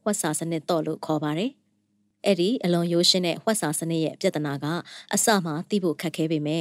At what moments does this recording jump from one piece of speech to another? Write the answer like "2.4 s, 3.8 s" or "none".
none